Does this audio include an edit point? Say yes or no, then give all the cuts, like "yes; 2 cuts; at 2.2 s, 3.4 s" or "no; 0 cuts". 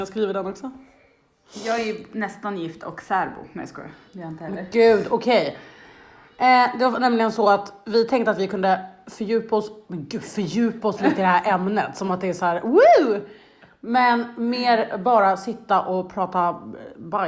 no; 0 cuts